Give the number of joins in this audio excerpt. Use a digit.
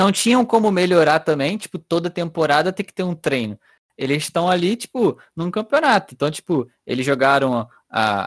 0